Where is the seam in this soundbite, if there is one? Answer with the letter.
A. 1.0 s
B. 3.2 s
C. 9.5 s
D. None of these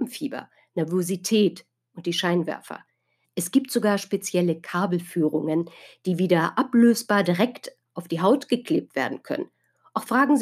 B